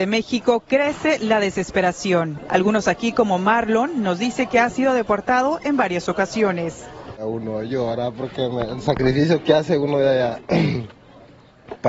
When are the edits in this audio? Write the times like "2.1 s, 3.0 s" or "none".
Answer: 2.5 s